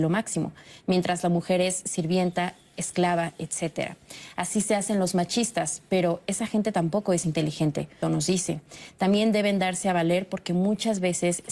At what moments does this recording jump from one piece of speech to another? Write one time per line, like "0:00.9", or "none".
0:08.0